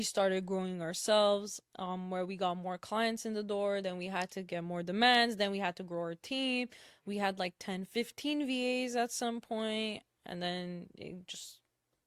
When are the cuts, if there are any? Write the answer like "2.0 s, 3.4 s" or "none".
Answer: none